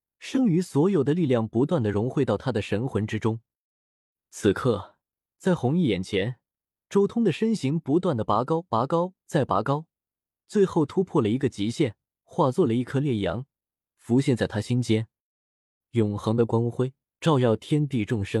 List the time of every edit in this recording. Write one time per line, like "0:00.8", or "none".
0:15.8